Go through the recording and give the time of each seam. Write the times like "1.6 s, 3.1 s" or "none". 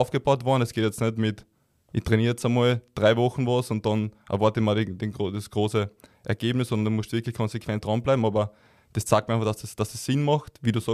none